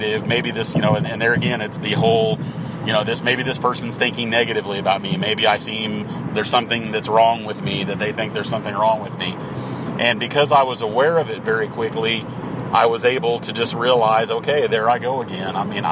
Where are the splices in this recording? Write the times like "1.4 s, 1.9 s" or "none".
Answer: none

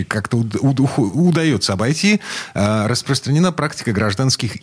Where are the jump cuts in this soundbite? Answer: none

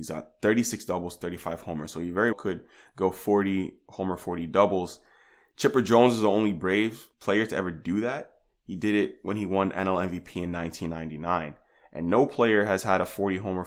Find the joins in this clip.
2.3 s, 7.1 s

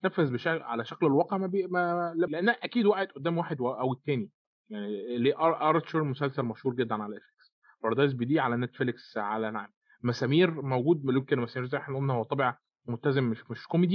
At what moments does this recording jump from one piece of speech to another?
2.3 s

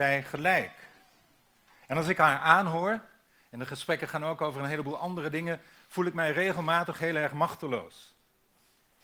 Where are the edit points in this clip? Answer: none

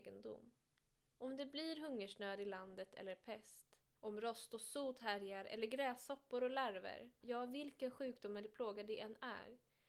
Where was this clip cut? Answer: 7.2 s

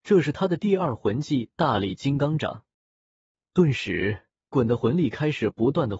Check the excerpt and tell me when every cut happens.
4.5 s

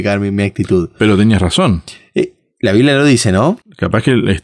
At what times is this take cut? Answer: none

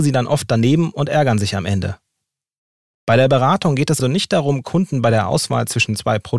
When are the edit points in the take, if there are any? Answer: 4.0 s

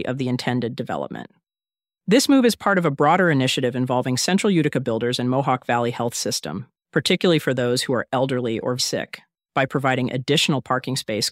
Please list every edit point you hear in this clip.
6.8 s, 8.8 s

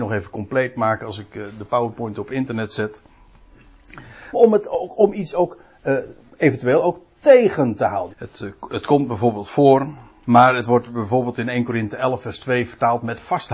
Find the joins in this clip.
4.3 s, 8.1 s, 10.2 s

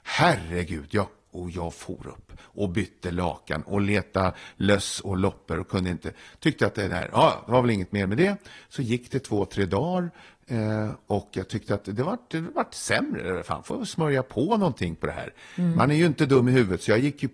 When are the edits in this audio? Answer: none

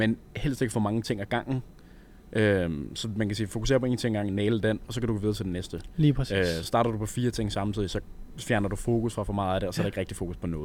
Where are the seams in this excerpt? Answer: none

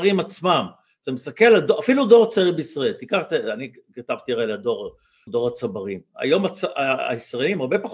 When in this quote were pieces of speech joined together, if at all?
5.3 s

